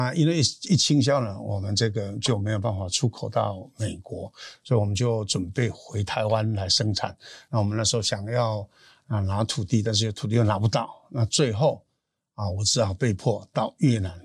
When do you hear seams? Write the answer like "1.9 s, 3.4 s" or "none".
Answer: none

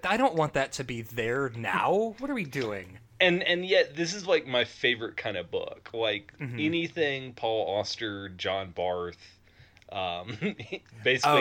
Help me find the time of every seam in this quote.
none

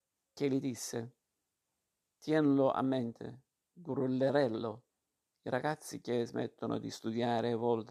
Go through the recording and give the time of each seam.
none

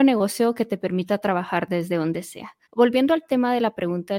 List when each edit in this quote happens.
2.6 s

